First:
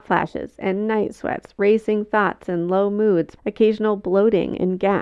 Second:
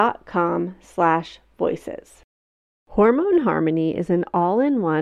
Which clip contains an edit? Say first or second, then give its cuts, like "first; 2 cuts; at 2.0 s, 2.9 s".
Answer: first; 1 cut; at 3.4 s